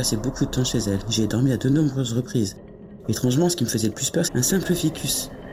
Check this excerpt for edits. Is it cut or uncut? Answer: cut